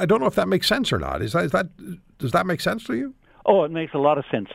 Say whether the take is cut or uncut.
uncut